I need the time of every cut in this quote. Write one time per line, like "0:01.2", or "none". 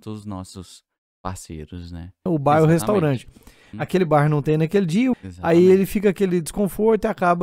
0:02.3
0:03.7
0:05.1